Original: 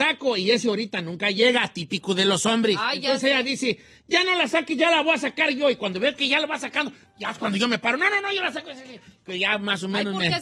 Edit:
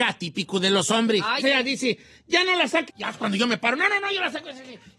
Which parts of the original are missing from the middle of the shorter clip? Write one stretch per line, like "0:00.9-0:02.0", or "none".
0:03.0-0:03.2
0:04.7-0:07.1